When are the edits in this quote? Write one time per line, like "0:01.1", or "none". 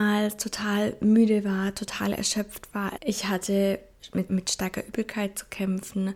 0:03.0
0:04.3